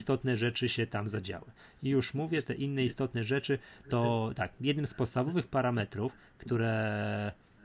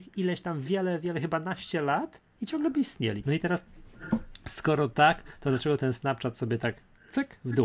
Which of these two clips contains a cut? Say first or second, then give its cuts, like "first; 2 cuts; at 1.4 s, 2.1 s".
second; 1 cut; at 3.2 s